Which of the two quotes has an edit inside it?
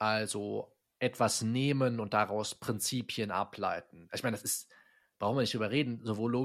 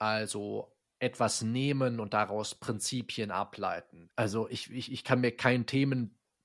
second; 1 cut; at 4.1 s

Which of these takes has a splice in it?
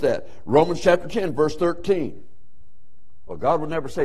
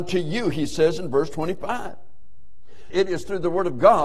second; 1 cut; at 2.9 s

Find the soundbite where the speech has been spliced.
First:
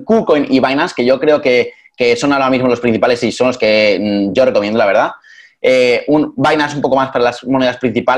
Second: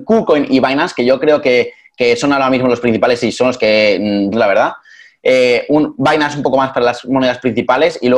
second; 1 cut; at 4.3 s

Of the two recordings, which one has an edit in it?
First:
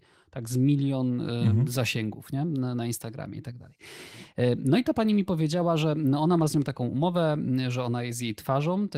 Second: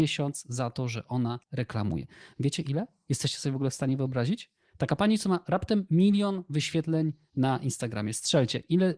second; 1 cut; at 1.4 s

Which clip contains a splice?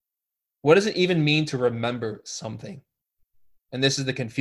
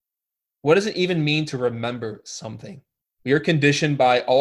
second; 1 cut; at 3.2 s

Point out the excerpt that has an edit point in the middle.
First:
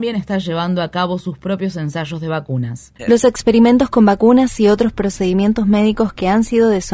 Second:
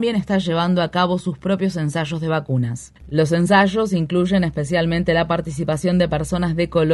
first; 1 cut; at 3.0 s

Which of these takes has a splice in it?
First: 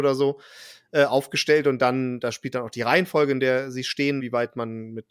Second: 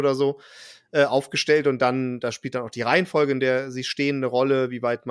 first; 1 cut; at 4.2 s

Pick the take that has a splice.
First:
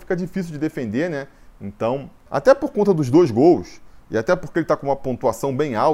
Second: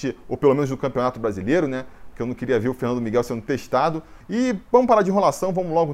second; 2 cuts; at 2.1 s, 4.2 s

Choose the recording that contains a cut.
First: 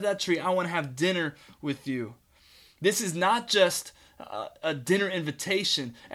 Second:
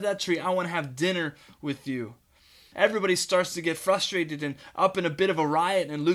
second; 1 cut; at 2.7 s

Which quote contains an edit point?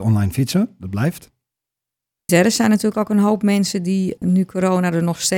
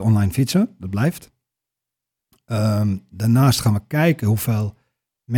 first; 2 cuts; at 2.3 s, 4.2 s

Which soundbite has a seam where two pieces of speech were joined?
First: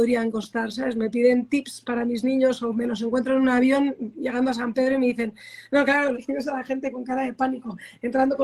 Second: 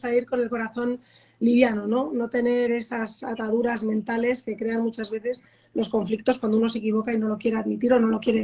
first; 1 cut; at 6.1 s

